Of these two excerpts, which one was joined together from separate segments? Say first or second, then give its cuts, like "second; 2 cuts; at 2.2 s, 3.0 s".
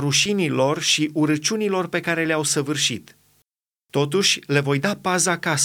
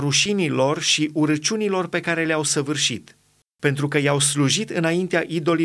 second; 1 cut; at 3.6 s